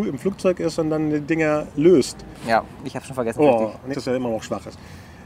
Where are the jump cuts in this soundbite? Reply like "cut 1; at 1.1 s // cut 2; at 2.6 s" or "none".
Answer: cut 1; at 2.8 s // cut 2; at 3.9 s